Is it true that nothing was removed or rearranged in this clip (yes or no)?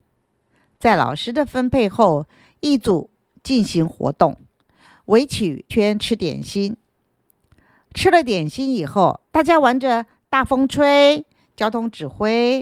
no